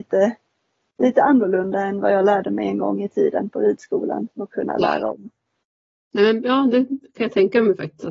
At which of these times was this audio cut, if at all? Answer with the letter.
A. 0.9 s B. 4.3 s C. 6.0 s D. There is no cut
B